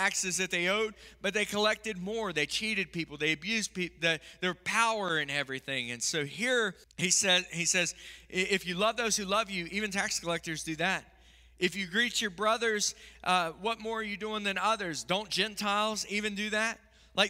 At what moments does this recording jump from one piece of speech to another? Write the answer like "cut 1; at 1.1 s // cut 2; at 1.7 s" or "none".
cut 1; at 6.8 s